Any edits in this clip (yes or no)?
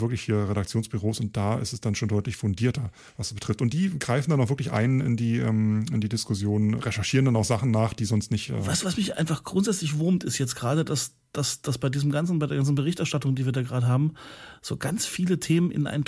yes